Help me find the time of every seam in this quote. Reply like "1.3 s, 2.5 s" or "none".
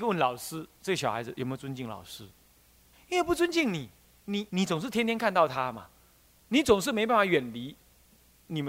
2.9 s, 4.5 s